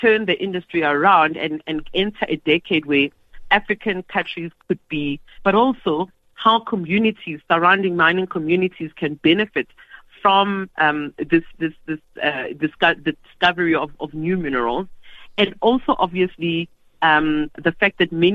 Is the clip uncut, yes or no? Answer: no